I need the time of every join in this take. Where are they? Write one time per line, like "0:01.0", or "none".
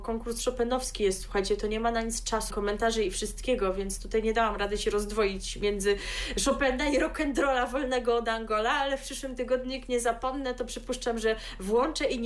0:02.5